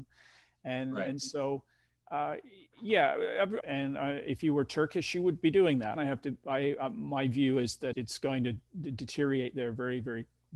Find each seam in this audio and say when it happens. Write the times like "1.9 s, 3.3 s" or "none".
3.6 s, 6.0 s, 7.9 s